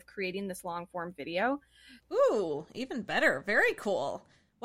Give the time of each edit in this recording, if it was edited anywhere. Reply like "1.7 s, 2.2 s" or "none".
2.0 s